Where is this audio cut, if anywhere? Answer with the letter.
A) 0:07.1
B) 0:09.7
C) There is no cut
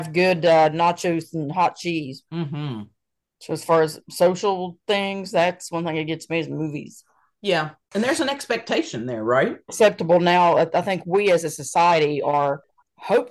B